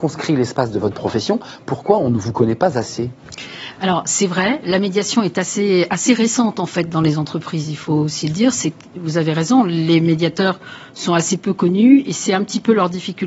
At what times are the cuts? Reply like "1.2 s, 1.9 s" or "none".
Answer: none